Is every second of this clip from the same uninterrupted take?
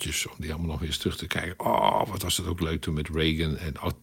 yes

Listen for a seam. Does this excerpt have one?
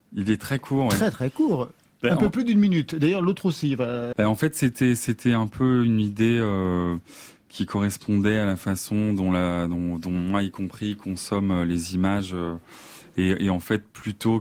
yes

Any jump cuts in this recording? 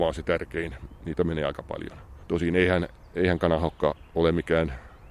yes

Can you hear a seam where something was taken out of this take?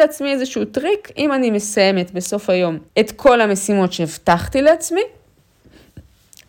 yes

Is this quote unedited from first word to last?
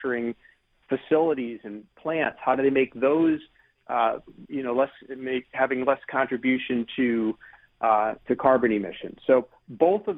no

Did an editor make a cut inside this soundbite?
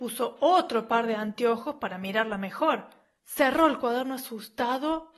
yes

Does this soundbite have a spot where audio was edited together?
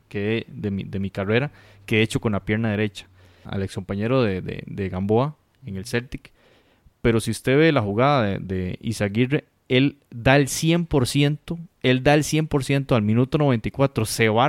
yes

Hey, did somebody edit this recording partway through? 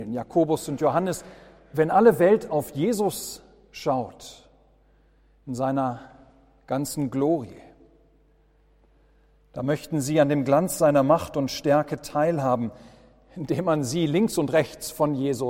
no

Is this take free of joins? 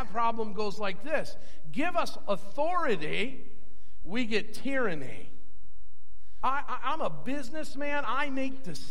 no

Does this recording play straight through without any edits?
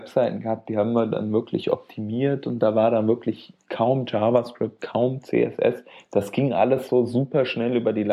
yes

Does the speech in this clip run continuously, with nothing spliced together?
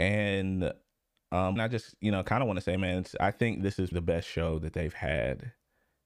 no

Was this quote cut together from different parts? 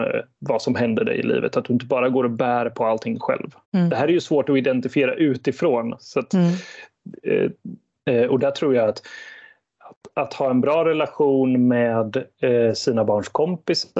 yes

